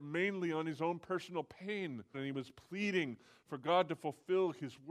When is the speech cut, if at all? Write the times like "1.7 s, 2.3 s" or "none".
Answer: 2.1 s